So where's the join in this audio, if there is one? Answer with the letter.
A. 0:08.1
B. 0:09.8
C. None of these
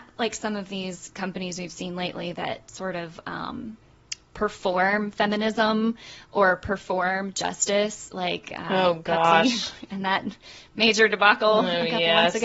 C